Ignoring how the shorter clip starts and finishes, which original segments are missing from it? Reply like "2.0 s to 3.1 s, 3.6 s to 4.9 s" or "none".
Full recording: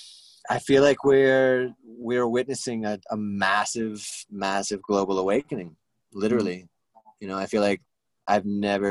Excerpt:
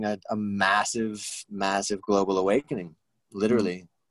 none